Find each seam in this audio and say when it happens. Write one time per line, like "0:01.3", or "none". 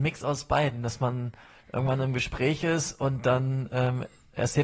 none